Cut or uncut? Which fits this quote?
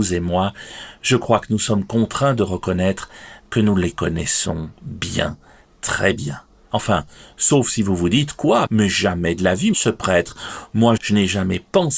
cut